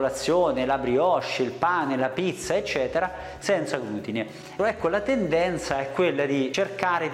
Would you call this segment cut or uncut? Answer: cut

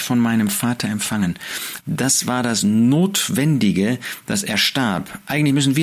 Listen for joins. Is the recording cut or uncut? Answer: cut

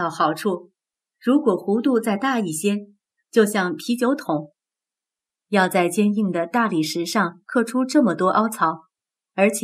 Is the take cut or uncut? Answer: cut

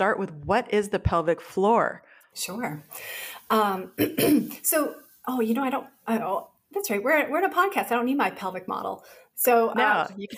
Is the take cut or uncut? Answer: uncut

